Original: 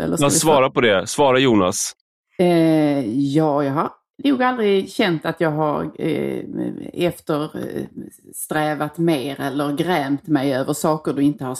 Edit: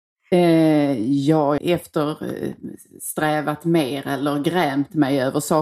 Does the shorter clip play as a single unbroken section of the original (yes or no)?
no